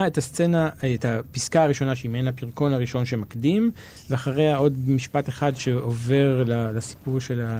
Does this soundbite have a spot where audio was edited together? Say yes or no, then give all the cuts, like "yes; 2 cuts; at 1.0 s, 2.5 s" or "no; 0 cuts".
no; 0 cuts